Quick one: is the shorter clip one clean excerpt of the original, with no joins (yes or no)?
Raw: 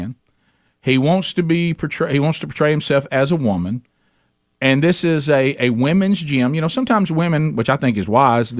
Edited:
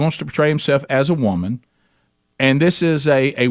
yes